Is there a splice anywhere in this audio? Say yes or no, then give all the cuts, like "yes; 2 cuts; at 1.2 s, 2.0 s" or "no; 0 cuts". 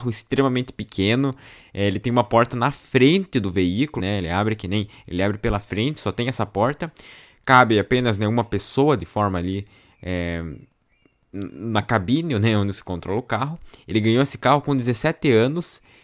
yes; 1 cut; at 4.0 s